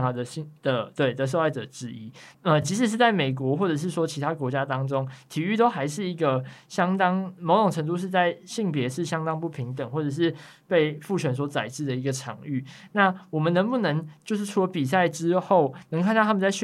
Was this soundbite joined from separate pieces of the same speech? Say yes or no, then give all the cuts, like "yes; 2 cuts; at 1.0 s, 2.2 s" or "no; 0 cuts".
no; 0 cuts